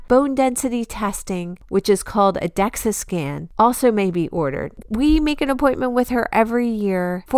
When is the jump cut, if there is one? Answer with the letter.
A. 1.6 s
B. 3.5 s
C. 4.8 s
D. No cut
C